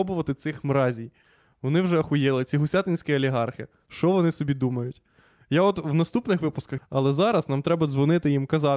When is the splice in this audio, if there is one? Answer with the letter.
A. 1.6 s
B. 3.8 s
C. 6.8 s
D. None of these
C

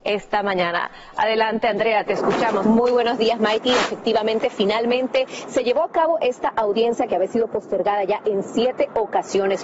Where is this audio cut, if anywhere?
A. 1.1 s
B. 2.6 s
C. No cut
B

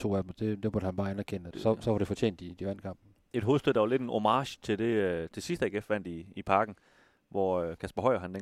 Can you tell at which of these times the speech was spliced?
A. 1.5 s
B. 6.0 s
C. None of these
A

